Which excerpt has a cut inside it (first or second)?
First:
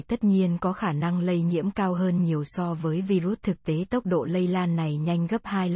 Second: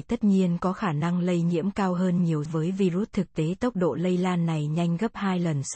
second